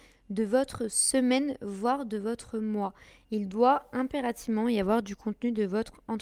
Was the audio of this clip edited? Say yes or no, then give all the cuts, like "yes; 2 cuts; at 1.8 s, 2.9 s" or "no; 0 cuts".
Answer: no; 0 cuts